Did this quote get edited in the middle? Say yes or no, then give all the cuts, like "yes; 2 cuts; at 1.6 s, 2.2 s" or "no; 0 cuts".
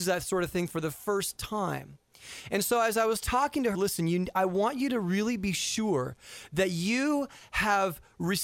yes; 1 cut; at 3.7 s